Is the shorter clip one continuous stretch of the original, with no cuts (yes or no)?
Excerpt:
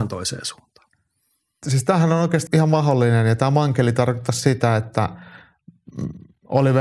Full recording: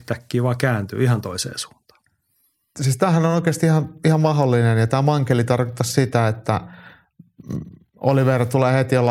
no